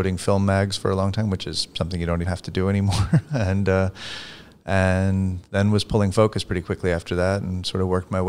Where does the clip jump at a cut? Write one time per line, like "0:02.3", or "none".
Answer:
0:02.2